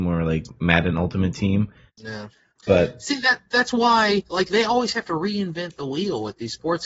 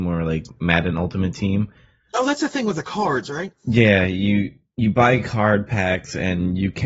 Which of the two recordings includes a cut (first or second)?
first